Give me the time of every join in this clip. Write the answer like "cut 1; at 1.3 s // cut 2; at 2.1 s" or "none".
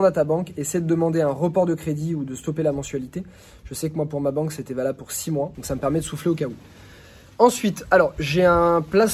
cut 1; at 5.5 s